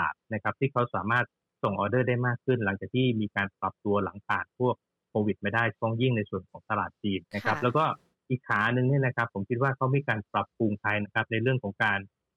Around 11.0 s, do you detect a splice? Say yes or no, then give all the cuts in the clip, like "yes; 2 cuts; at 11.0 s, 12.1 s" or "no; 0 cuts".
yes; 2 cuts; at 7.2 s, 11.0 s